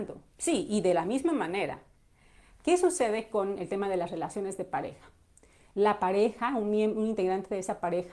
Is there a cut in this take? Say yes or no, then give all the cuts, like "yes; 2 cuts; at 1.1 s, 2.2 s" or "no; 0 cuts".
no; 0 cuts